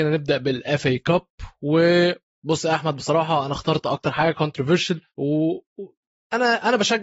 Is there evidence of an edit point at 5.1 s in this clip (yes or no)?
yes